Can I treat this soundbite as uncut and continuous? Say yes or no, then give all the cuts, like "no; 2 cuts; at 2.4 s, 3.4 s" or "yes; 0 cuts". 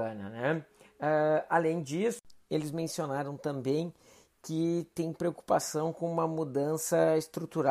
yes; 0 cuts